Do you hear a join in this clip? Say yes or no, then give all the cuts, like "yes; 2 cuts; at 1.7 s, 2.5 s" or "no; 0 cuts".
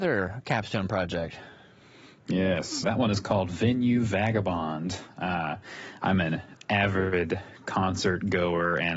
yes; 1 cut; at 2.8 s